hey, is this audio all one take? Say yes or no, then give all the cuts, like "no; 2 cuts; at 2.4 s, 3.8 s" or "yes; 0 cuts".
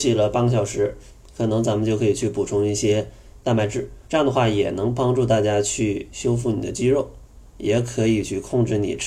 no; 2 cuts; at 4.0 s, 7.5 s